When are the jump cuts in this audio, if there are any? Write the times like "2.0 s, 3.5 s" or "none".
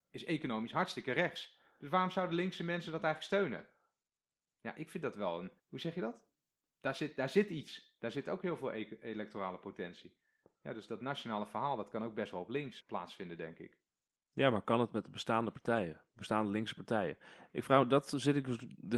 5.6 s, 12.8 s